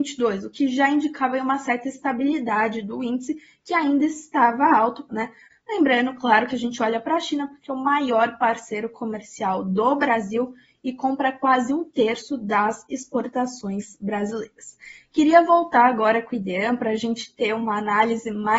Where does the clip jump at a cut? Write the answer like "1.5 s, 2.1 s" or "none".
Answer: 5.1 s